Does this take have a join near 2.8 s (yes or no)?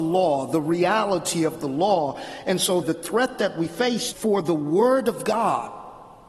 yes